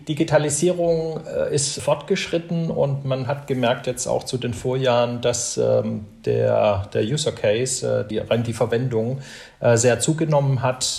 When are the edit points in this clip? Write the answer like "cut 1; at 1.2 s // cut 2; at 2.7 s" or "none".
cut 1; at 1.8 s // cut 2; at 8.1 s